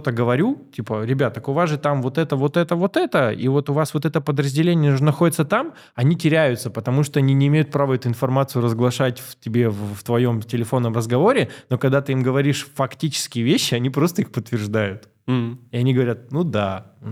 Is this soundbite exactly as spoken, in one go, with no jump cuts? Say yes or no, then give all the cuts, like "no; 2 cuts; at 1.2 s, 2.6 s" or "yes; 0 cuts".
yes; 0 cuts